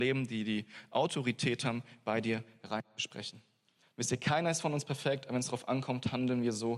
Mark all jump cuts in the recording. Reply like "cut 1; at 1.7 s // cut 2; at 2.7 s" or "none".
none